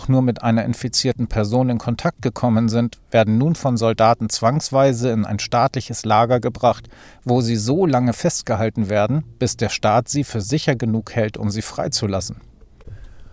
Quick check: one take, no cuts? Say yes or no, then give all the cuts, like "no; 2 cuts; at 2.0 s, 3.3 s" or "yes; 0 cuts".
yes; 0 cuts